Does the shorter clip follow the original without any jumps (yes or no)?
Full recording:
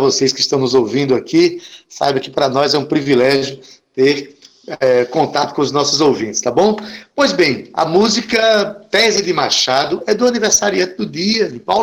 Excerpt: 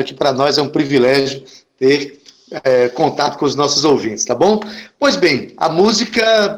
yes